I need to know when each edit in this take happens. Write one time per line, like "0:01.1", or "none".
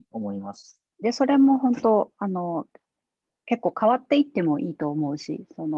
0:01.0